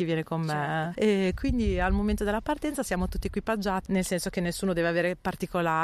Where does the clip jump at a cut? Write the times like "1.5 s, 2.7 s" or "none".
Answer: 0.9 s, 3.9 s